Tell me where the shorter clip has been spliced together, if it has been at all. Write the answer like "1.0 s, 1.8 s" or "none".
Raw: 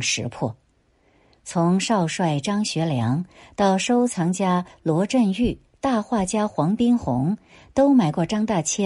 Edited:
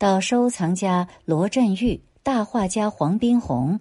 none